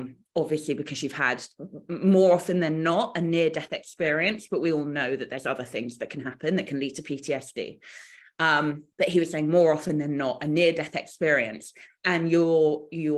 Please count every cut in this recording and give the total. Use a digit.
1